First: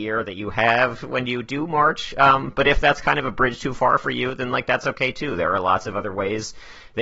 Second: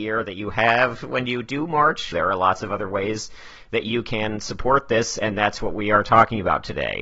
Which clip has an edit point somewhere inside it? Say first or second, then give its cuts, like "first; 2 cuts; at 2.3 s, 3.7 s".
second; 1 cut; at 2.1 s